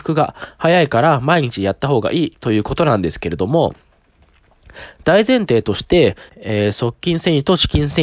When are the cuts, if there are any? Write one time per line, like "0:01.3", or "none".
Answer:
0:06.3